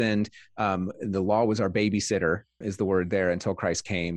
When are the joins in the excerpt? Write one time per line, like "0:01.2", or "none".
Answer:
0:02.6